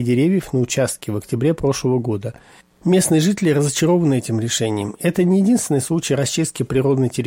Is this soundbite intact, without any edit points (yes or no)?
yes